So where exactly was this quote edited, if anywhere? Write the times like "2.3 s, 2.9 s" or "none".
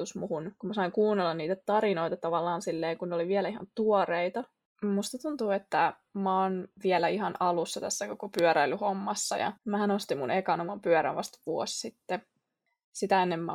4.7 s, 9.6 s